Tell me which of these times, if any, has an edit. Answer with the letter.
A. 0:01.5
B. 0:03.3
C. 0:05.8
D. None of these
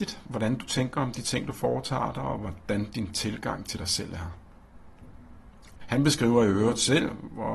C